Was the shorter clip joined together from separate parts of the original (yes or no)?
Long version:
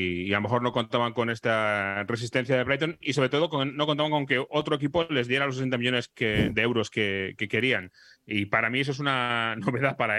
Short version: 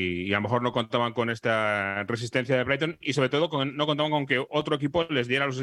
no